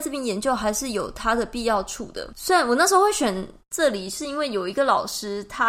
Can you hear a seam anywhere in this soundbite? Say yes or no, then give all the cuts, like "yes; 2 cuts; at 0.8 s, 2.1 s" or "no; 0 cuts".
no; 0 cuts